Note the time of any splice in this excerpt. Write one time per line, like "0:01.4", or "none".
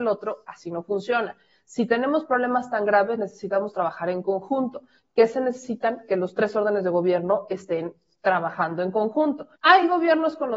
0:09.6